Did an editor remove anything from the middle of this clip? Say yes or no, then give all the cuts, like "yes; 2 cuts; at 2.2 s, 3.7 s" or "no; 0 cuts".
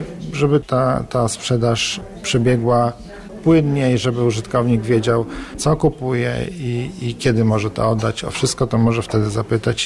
no; 0 cuts